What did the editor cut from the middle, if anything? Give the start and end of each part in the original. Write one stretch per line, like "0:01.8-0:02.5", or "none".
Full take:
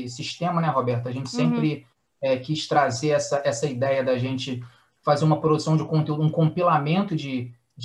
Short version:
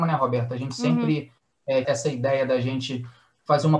0:02.4-0:03.4